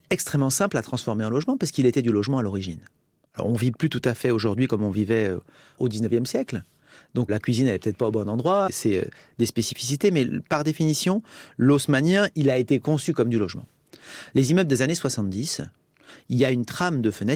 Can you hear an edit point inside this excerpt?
yes; 3 cuts; at 7.3 s, 8.7 s, 12.3 s

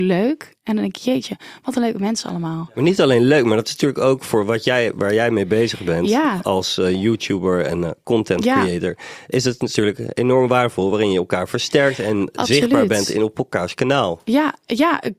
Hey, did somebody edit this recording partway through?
no; 0 cuts

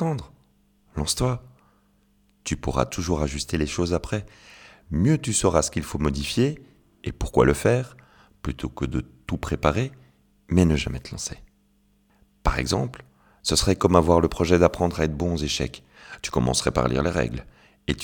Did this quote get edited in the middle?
no; 0 cuts

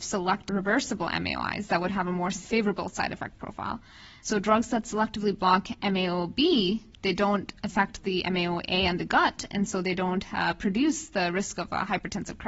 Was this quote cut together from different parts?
no; 0 cuts

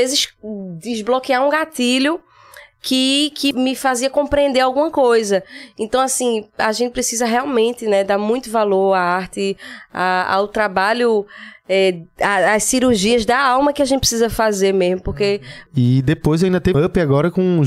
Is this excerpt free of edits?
no; 3 cuts; at 3.5 s, 15.7 s, 16.7 s

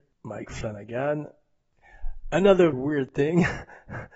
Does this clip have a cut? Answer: yes; 1 cut; at 2.7 s

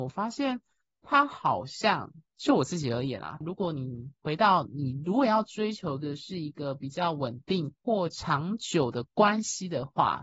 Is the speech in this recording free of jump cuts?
no; 2 cuts; at 3.4 s, 7.8 s

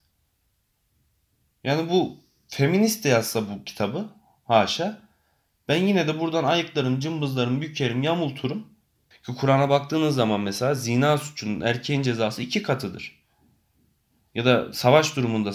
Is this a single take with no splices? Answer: no; 1 cut; at 9.1 s

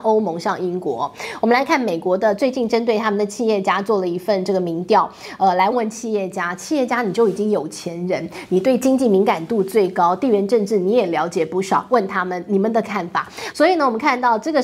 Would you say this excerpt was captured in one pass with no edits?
no; 2 cuts; at 5.7 s, 13.5 s

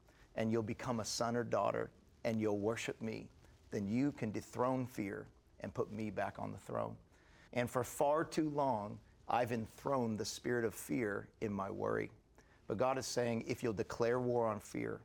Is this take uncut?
no; 1 cut; at 7.5 s

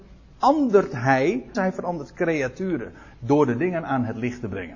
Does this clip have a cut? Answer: yes; 1 cut; at 1.5 s

